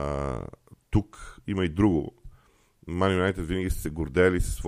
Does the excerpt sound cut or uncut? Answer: uncut